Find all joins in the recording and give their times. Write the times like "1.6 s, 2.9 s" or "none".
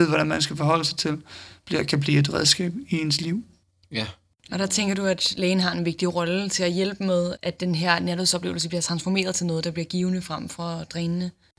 7.4 s